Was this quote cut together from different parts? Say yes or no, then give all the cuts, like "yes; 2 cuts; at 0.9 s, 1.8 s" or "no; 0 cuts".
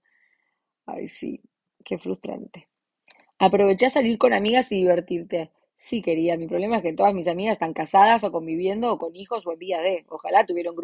no; 0 cuts